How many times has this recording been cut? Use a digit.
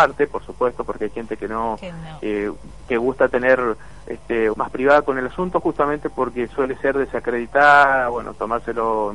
1